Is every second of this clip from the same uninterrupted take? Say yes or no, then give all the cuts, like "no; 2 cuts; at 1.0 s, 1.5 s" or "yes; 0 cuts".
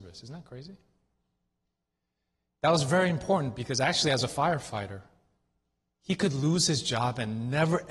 yes; 0 cuts